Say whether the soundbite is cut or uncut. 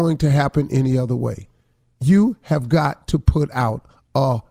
uncut